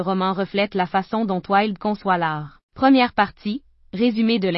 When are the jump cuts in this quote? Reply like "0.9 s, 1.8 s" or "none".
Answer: 2.6 s